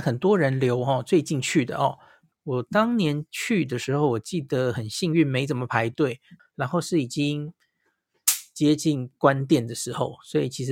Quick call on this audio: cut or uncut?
cut